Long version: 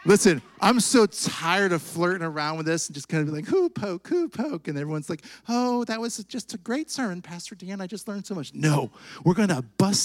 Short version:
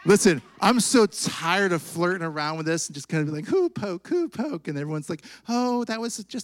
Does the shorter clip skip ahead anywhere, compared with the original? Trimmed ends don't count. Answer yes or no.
no